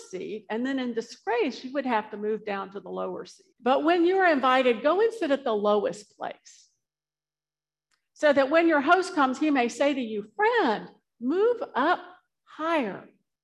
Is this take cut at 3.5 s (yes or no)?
yes